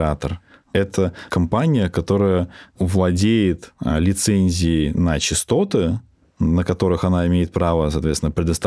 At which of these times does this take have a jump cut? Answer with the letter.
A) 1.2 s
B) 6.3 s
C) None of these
C